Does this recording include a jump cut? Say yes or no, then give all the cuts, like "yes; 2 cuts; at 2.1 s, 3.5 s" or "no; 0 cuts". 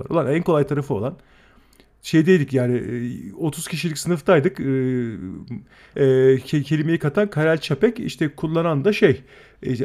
yes; 1 cut; at 5.9 s